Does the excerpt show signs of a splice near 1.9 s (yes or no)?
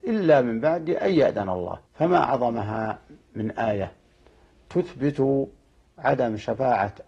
yes